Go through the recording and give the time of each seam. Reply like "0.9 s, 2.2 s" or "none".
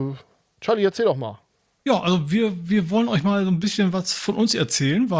none